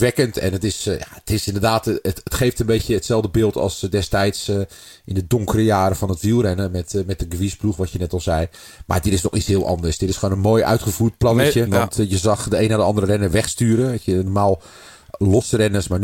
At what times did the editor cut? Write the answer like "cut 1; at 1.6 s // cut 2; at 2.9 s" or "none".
cut 1; at 11.7 s